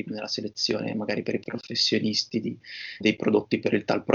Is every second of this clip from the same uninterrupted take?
no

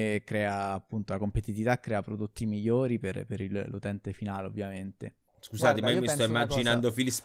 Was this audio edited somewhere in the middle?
yes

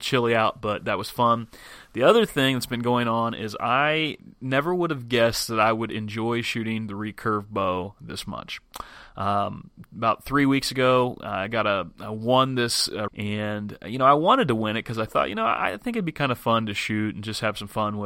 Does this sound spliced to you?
yes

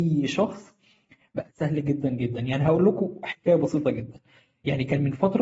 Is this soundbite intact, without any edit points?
yes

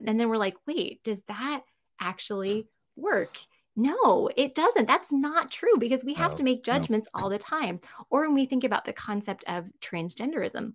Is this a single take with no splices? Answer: yes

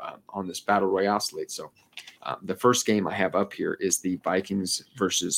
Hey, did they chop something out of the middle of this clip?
yes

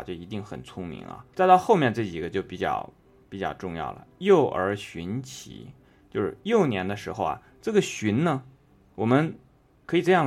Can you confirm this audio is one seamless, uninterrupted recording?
no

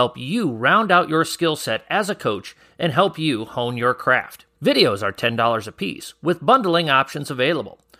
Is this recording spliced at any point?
yes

